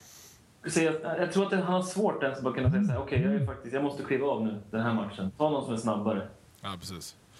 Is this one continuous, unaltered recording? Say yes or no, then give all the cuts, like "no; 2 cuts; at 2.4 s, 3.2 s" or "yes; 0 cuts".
yes; 0 cuts